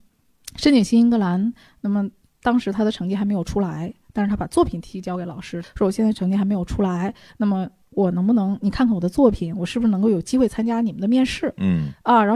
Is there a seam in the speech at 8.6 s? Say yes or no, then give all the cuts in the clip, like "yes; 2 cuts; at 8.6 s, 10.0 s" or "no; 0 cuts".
no; 1 cut; at 5.6 s